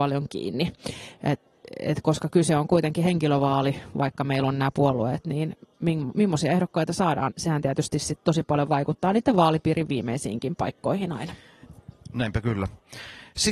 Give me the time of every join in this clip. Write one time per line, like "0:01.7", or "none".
0:07.3